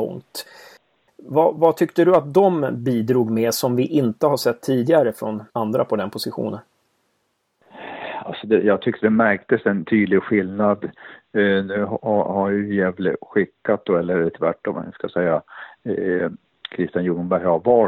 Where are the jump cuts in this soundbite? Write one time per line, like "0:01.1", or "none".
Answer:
0:01.1
0:05.5